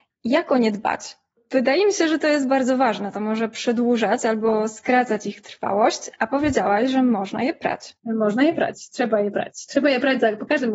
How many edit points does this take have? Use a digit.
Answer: 1